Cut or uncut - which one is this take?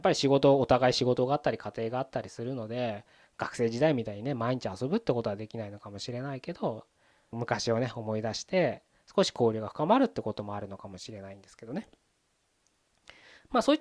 cut